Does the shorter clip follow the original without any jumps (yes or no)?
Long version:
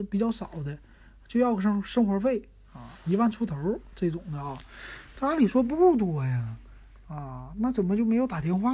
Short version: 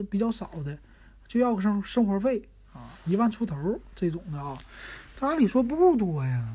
yes